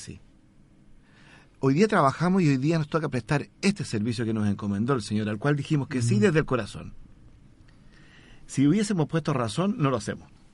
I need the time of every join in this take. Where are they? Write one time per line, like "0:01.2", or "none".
none